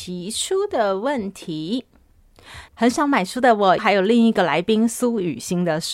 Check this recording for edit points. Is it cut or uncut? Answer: cut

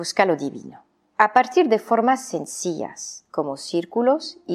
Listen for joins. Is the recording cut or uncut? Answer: uncut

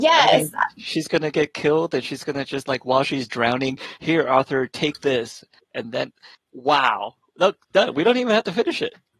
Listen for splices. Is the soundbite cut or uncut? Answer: uncut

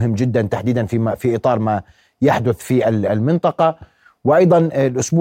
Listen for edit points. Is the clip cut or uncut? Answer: uncut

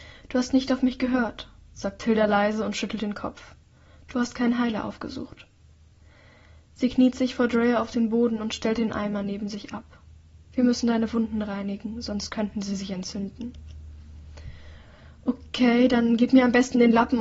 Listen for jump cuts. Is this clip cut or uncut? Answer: uncut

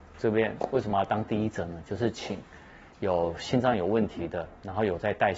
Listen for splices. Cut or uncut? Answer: uncut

